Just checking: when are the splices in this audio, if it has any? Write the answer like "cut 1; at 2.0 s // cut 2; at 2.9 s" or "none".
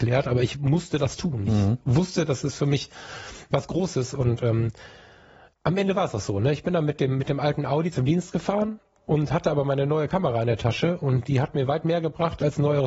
none